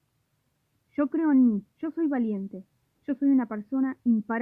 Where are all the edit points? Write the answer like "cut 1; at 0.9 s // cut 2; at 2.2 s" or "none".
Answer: cut 1; at 1.7 s